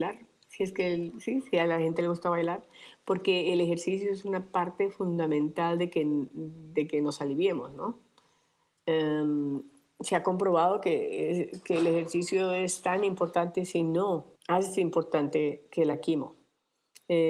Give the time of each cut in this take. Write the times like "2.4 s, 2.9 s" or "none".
14.3 s

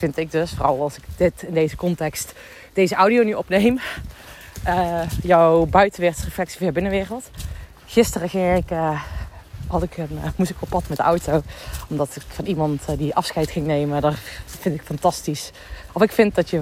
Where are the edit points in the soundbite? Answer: none

